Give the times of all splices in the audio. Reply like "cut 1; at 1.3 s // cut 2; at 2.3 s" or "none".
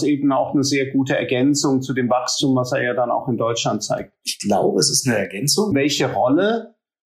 cut 1; at 5.7 s